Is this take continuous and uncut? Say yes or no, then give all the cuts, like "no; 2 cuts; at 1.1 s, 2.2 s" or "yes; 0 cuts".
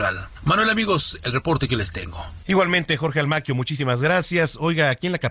no; 1 cut; at 2.4 s